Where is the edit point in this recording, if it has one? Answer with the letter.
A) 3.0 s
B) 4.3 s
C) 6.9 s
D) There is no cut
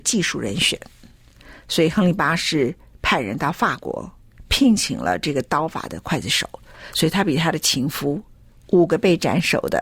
D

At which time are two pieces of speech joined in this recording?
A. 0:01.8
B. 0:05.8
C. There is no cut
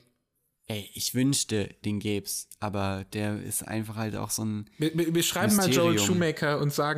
A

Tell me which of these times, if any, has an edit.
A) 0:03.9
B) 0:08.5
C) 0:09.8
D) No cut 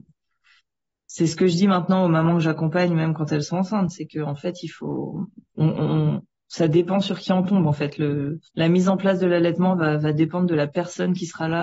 B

